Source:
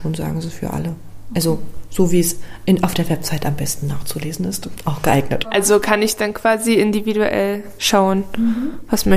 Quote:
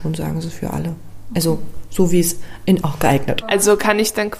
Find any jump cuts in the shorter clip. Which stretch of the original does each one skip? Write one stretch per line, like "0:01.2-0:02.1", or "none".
0:02.8-0:04.8